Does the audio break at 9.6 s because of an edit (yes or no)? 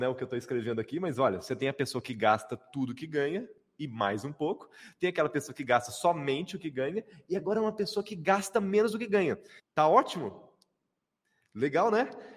yes